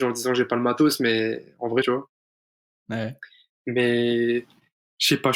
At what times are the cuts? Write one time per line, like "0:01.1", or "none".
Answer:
0:01.8